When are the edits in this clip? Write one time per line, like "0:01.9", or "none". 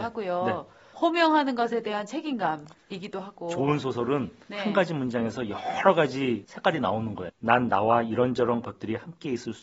0:07.3